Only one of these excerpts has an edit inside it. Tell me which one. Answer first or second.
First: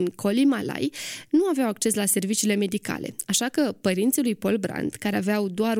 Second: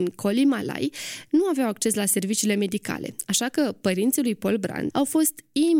second